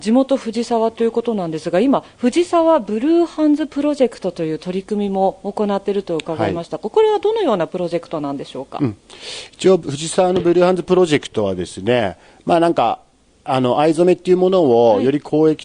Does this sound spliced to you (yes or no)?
no